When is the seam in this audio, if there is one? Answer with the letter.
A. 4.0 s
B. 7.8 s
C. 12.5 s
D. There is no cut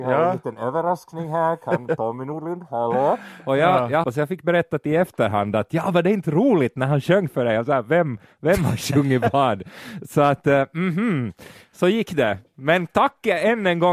A